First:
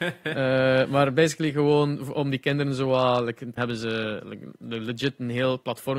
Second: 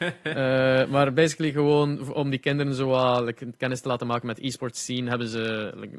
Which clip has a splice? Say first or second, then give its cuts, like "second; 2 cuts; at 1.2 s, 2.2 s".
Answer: first; 1 cut; at 3.6 s